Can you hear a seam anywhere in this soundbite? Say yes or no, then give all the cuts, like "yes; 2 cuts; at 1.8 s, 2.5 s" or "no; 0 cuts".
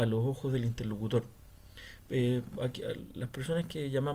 yes; 1 cut; at 2.6 s